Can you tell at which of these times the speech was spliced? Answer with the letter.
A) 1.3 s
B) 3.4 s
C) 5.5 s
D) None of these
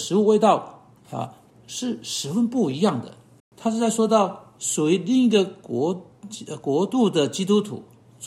B